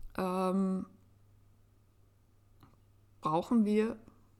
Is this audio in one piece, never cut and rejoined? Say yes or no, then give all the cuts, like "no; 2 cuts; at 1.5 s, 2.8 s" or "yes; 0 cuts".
yes; 0 cuts